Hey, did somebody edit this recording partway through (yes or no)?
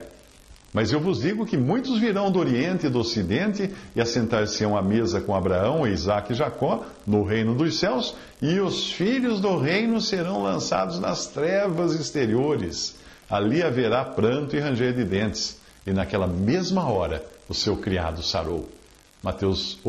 yes